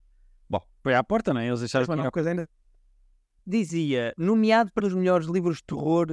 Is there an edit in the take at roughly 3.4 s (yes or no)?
yes